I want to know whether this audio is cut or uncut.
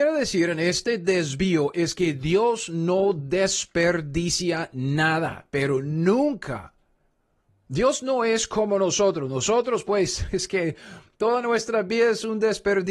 uncut